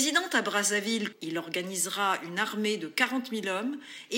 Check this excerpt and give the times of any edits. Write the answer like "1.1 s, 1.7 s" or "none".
1.1 s

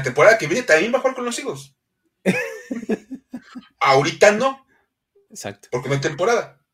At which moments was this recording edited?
none

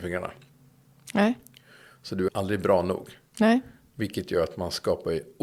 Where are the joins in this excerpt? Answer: 2.3 s

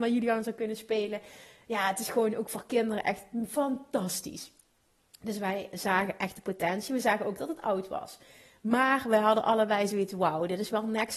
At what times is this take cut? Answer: none

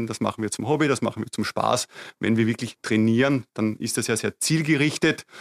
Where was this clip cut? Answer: none

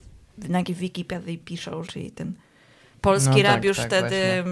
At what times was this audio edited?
1.9 s

